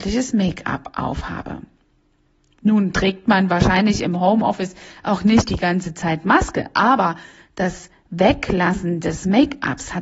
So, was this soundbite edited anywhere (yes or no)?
no